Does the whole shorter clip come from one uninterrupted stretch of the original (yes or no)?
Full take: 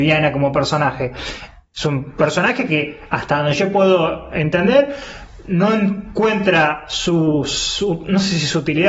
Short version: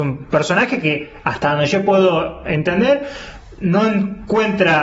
yes